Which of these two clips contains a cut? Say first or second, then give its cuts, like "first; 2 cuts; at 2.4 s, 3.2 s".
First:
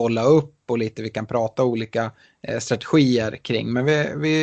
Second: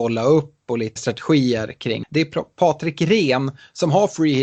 second; 2 cuts; at 1.0 s, 2.0 s